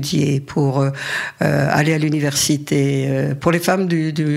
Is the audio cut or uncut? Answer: uncut